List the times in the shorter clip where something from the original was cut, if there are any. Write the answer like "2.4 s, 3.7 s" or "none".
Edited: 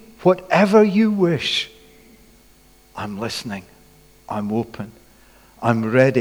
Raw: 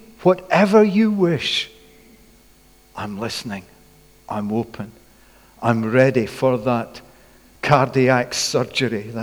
none